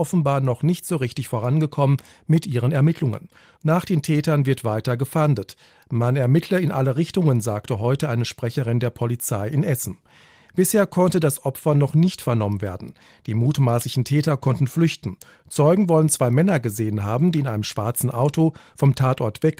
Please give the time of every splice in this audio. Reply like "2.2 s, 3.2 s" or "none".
none